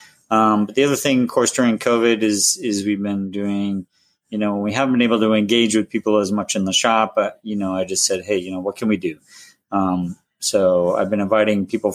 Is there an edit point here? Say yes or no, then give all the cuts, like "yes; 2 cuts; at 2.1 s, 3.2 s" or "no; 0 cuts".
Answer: no; 0 cuts